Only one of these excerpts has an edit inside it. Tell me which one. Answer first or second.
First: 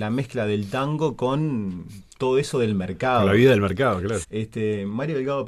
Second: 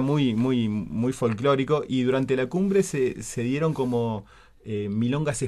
first